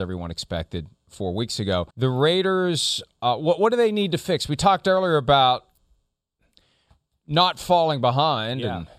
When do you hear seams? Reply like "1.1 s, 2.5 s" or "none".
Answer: 1.9 s